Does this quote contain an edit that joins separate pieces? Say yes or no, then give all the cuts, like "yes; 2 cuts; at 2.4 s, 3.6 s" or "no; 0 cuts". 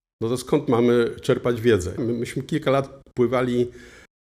yes; 1 cut; at 2.0 s